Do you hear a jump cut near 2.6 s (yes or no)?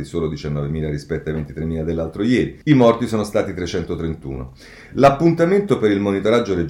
yes